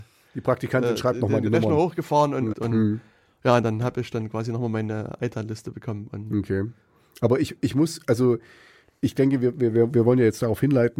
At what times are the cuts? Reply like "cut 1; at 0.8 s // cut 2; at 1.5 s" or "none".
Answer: cut 1; at 2.5 s